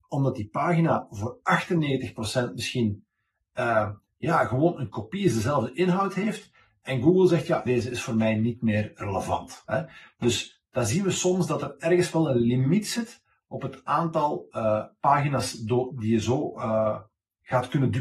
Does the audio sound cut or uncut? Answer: cut